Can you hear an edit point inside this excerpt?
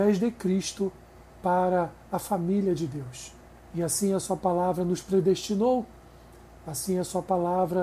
yes; 1 cut; at 3.6 s

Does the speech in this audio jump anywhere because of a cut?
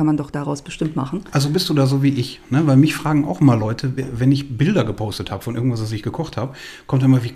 no; 0 cuts

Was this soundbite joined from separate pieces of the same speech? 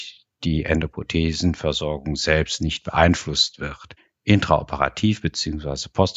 no; 0 cuts

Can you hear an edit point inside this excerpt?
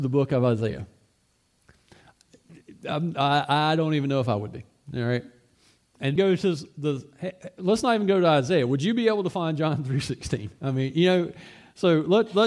yes; 1 cut; at 6.2 s

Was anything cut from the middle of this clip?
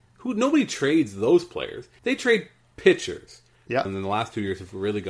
yes; 2 cuts; at 2.0 s, 3.9 s

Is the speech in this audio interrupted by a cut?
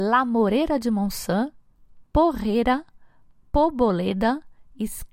no; 0 cuts

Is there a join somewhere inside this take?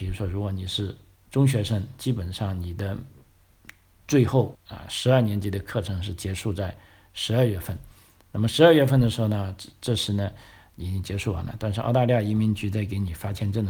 yes; 1 cut; at 4.6 s

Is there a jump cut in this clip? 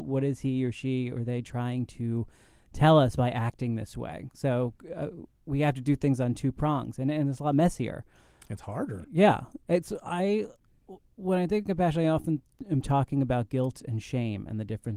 no; 0 cuts

